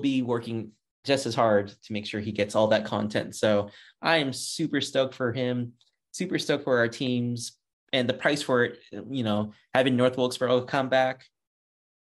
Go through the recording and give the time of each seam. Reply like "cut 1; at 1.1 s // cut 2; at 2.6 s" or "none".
cut 1; at 7.7 s